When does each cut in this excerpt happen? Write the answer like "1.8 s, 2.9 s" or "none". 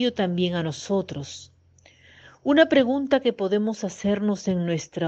none